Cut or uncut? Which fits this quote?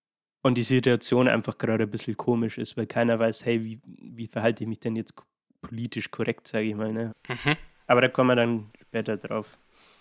cut